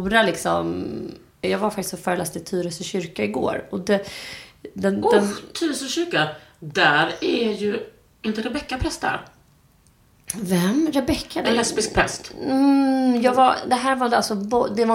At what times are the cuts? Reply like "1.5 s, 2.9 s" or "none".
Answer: 1.4 s

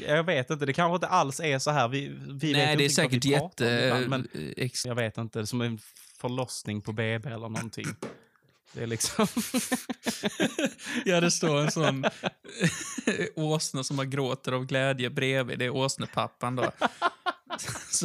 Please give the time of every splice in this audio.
4.8 s

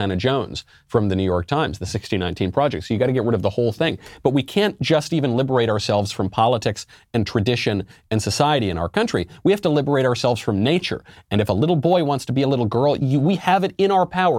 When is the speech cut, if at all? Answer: 13.0 s

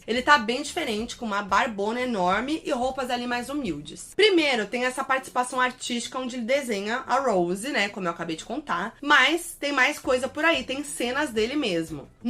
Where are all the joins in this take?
4.1 s

